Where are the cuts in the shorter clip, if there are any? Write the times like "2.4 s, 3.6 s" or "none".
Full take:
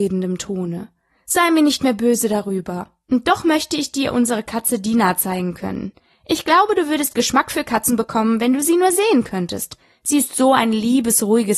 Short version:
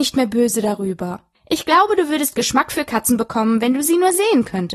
1.3 s